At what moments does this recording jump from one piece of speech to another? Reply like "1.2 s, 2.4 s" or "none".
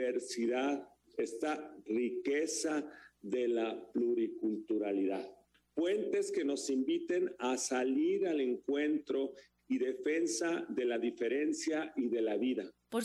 none

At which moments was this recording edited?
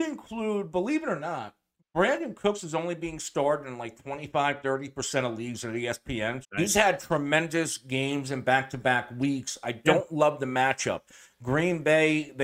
6.4 s

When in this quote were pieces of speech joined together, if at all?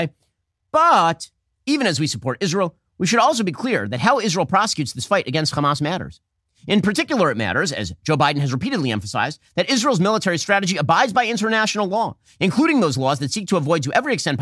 none

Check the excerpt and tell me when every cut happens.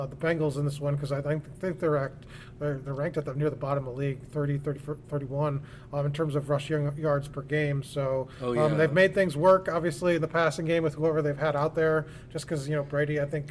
none

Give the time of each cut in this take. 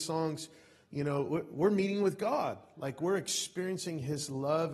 none

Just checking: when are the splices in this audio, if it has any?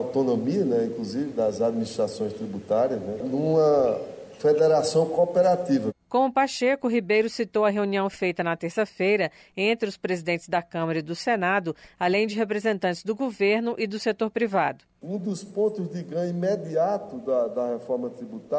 3.2 s

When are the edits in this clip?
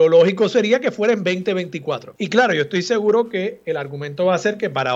2.2 s

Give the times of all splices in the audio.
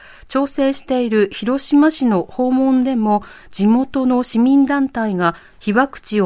none

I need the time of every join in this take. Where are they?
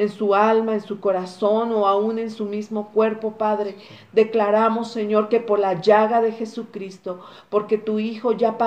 none

